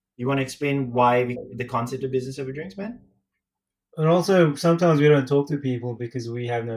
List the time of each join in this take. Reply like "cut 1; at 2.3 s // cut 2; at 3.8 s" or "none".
none